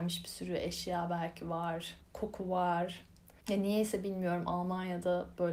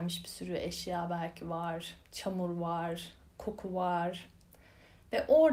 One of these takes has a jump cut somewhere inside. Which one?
first; 2 cuts; at 2.0 s, 3.4 s

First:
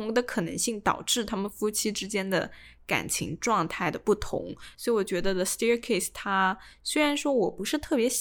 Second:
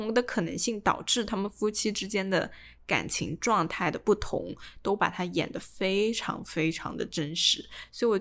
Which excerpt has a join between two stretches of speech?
first; 1 cut; at 4.7 s

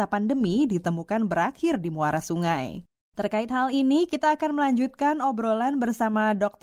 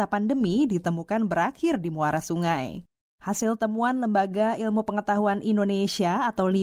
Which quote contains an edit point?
second; 1 cut; at 3.1 s

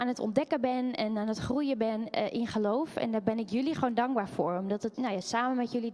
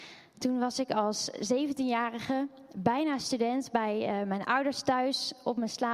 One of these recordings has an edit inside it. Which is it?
first; 1 cut; at 4.9 s

